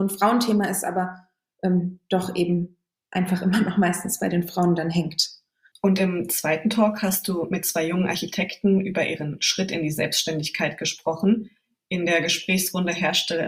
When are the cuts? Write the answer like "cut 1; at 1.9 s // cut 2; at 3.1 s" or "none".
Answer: cut 1; at 5.7 s